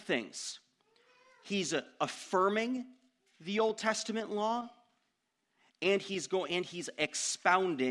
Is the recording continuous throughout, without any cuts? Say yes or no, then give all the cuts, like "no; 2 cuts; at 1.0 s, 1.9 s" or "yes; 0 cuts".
yes; 0 cuts